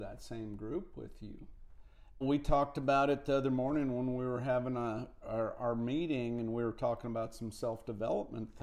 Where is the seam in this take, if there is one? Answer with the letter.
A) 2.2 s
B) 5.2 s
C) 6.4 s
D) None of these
A